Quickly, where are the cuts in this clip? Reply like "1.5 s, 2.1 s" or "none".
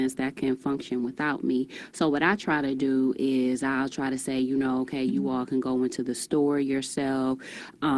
none